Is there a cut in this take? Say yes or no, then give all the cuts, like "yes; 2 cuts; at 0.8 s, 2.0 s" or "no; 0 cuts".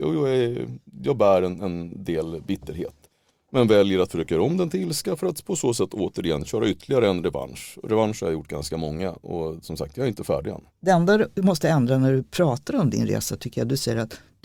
yes; 1 cut; at 10.7 s